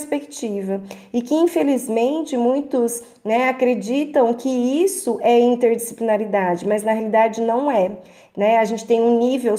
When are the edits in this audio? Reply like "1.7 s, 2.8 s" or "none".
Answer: none